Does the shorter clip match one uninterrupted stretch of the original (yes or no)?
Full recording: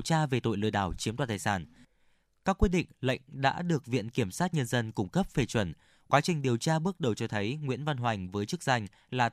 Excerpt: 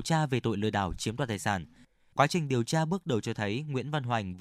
no